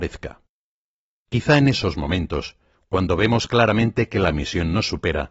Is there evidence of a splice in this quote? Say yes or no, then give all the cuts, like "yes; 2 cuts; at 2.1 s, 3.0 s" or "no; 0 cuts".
no; 0 cuts